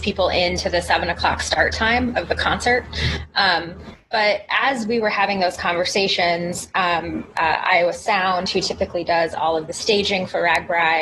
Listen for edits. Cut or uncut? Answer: cut